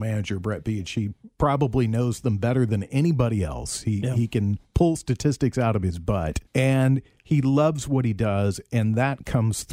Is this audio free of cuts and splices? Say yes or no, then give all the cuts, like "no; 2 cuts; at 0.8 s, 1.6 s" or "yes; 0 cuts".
no; 1 cut; at 6.5 s